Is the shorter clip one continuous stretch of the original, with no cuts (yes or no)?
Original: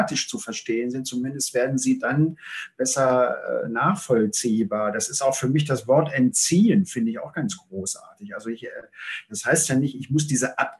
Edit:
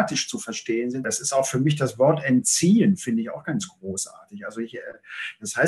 no